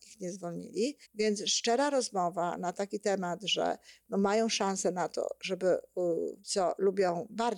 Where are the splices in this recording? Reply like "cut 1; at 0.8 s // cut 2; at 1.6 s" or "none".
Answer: cut 1; at 1.0 s // cut 2; at 6.4 s